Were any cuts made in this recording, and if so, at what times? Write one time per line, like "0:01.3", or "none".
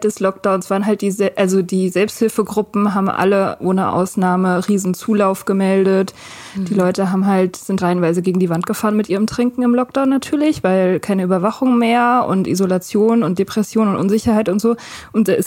0:07.8